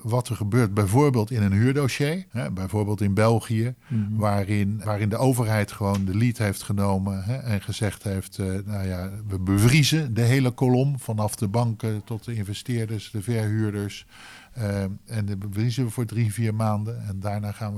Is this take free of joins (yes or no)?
no